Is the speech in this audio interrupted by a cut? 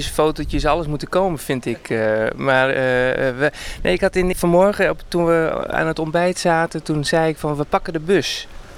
yes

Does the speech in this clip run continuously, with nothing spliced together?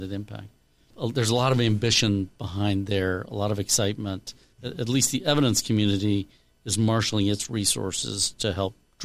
yes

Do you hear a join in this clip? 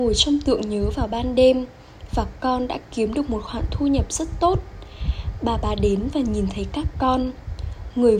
no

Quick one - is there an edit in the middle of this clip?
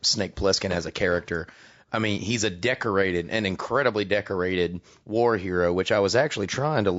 no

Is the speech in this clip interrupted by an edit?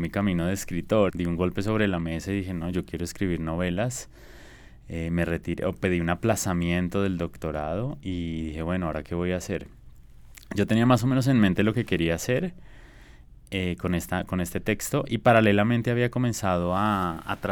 yes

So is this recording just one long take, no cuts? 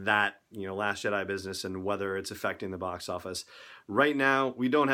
yes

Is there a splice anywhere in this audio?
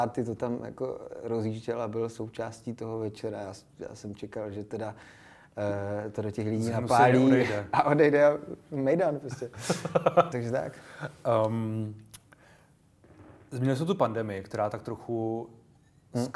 yes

